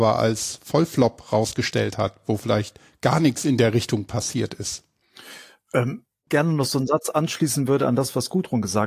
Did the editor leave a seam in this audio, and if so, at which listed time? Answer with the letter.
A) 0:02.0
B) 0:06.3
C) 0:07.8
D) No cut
B